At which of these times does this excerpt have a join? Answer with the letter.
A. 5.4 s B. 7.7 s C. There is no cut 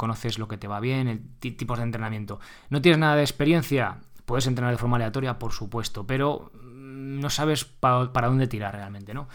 C